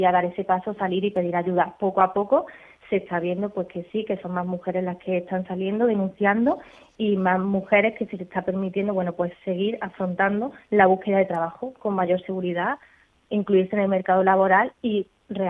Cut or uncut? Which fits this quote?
uncut